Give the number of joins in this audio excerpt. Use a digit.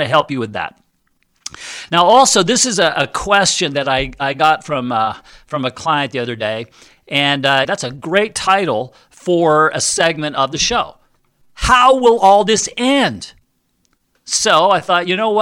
2